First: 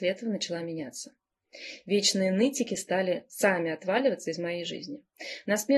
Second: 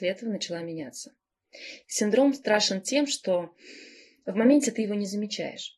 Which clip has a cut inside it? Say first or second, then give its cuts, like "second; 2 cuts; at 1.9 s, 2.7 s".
second; 1 cut; at 1.8 s